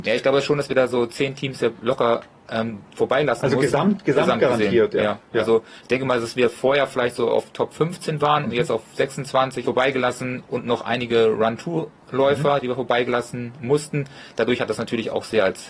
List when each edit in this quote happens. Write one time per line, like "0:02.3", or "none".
0:09.6